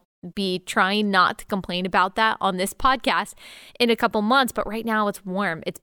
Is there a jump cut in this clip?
no; 0 cuts

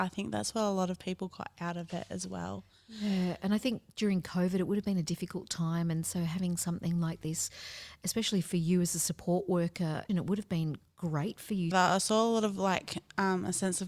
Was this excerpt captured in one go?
no; 2 cuts; at 10.1 s, 11.7 s

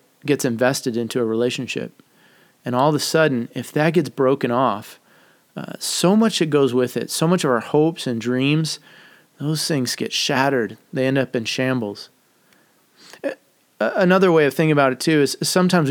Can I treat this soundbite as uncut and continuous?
yes; 0 cuts

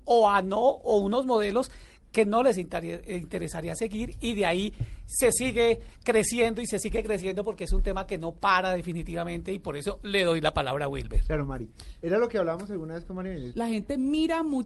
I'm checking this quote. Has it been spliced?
yes; 1 cut; at 13.5 s

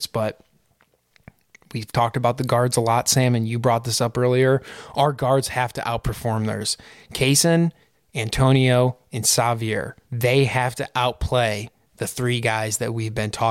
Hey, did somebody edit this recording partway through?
yes; 2 cuts; at 7.9 s, 10.0 s

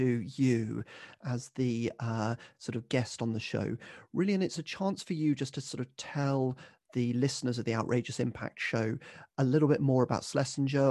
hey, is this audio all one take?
yes; 0 cuts

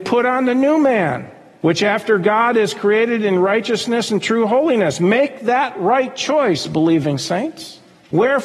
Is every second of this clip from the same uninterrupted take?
yes; 0 cuts

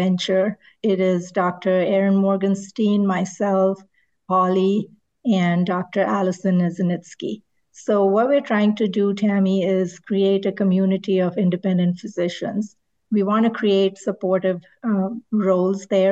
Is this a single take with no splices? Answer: yes; 0 cuts

